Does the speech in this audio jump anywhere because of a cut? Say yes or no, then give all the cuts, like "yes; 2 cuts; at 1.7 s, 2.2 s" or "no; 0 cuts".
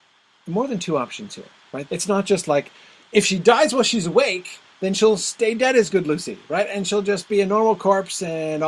yes; 2 cuts; at 1.9 s, 4.7 s